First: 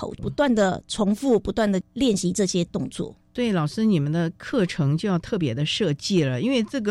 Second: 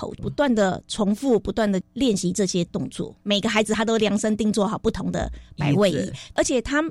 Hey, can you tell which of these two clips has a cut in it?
second; 1 cut; at 3.2 s

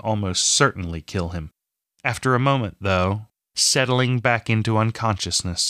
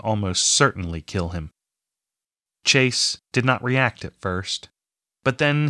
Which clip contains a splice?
first; 2 cuts; at 1.8 s, 3.4 s

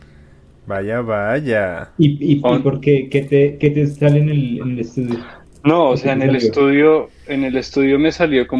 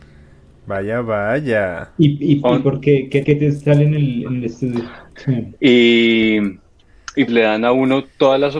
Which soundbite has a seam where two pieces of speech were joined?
second; 3 cuts; at 3.2 s, 5.2 s, 7.3 s

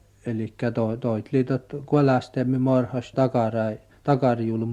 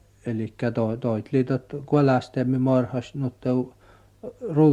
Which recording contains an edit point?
first; 1 cut; at 3.1 s

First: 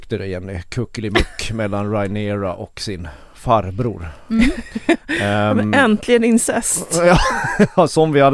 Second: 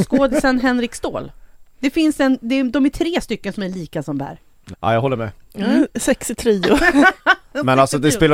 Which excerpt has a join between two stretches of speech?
second; 1 cut; at 4.7 s

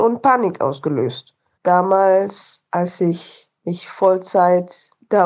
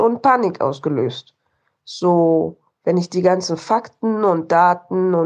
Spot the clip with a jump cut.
first; 1 cut; at 1.6 s

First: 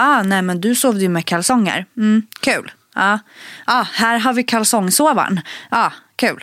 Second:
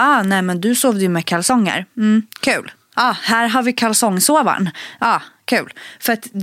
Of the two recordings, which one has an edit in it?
second; 1 cut; at 2.9 s

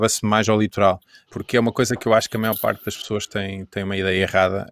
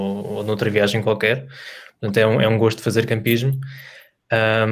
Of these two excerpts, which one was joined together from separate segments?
first; 1 cut; at 1.3 s

